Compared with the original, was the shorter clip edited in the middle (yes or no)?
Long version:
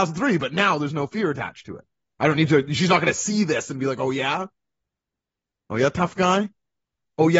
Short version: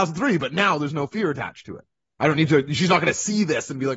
no